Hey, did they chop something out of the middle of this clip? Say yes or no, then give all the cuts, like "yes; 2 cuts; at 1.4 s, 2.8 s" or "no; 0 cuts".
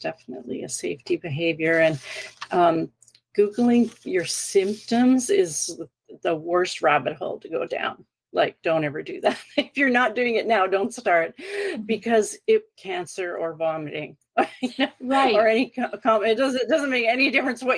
yes; 1 cut; at 12.8 s